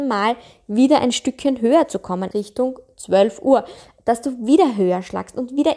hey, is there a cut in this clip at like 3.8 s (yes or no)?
no